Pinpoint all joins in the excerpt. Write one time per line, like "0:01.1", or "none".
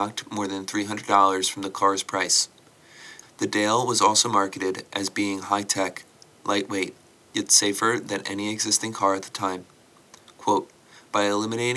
0:03.2